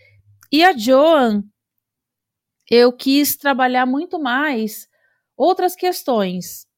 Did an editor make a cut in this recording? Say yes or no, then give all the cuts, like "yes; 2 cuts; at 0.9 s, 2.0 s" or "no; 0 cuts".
no; 0 cuts